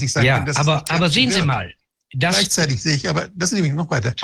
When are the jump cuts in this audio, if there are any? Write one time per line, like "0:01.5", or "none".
none